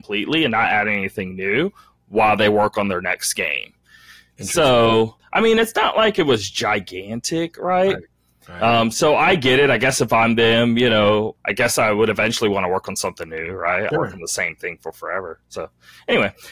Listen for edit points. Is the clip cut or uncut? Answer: cut